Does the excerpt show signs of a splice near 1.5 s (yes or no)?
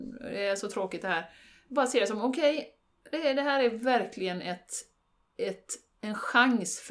no